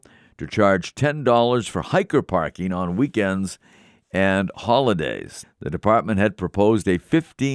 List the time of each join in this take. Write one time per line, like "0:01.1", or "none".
0:05.4